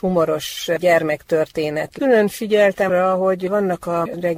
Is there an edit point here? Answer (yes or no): yes